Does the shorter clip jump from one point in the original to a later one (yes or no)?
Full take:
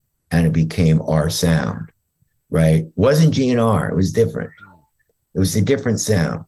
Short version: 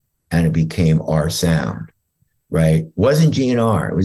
no